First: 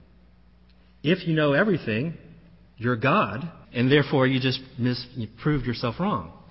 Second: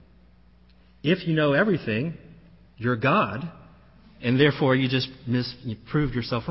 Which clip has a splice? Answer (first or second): first